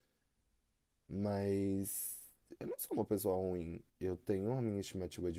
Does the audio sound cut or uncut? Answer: cut